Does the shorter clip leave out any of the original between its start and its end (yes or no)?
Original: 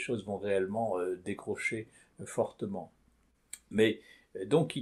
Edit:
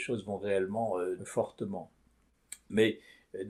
yes